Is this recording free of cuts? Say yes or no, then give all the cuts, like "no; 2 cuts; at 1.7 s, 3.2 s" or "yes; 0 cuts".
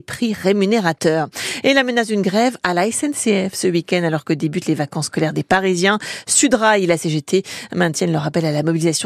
yes; 0 cuts